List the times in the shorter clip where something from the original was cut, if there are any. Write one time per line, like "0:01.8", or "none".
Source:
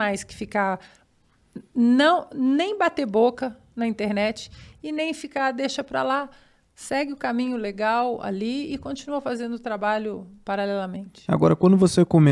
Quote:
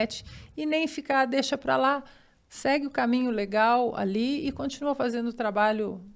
none

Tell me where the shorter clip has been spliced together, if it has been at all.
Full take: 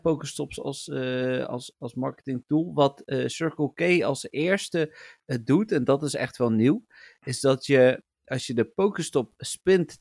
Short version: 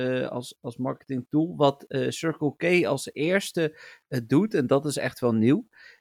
none

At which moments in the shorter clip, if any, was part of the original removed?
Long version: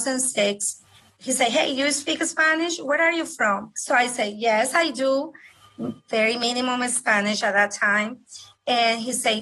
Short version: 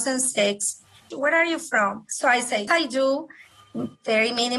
0:01.1
0:02.7

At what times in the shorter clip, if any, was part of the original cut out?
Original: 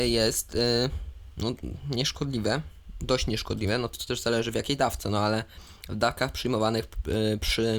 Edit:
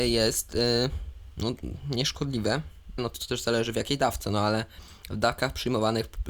0:03.0

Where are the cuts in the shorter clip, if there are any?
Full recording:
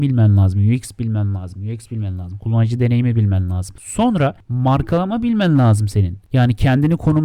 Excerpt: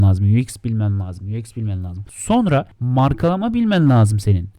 0:02.0

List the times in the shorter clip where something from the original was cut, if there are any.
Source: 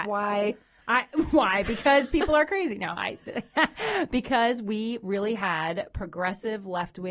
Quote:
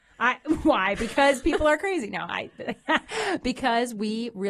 none

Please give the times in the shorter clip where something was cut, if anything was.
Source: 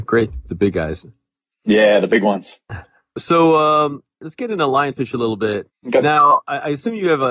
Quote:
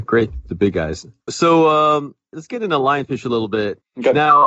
0:01.2

